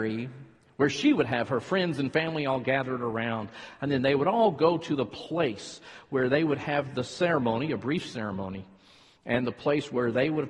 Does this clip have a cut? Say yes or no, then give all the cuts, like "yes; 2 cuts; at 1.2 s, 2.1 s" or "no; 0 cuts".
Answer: no; 0 cuts